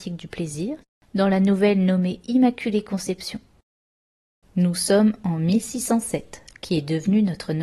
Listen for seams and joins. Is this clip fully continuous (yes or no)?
no